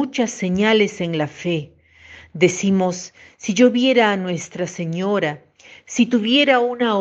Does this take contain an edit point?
no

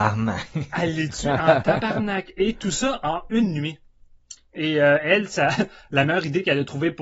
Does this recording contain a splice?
yes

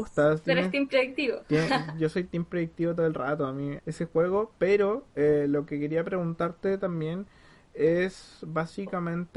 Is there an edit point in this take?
yes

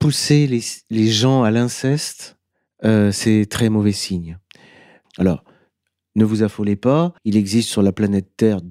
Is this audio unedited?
no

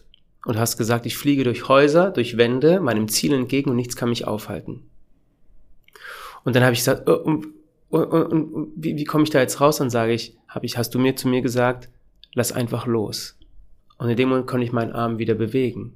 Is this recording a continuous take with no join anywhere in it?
yes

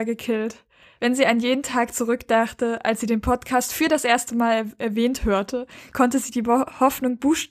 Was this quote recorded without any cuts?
yes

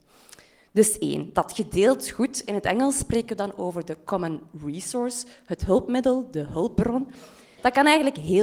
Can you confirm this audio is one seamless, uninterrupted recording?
yes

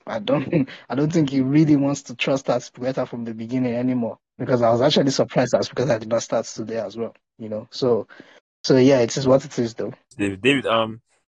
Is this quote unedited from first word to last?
yes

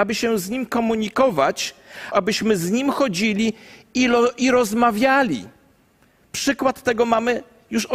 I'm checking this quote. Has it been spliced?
yes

